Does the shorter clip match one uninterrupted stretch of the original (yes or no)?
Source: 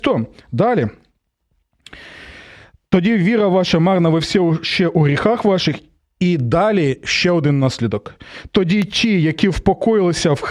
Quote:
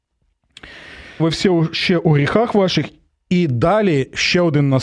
no